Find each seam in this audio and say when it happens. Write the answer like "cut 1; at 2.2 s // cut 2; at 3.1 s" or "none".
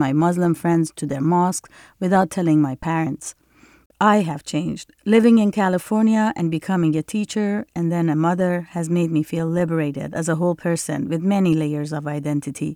cut 1; at 3.9 s